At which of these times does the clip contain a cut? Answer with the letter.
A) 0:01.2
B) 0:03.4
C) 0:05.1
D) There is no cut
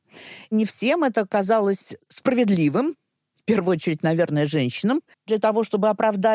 C